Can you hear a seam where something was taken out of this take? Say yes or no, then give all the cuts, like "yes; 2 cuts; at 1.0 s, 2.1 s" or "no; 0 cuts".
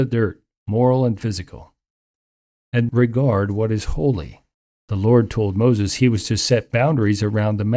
yes; 1 cut; at 2.9 s